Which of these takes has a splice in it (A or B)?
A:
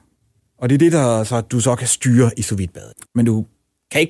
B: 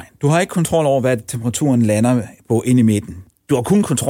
A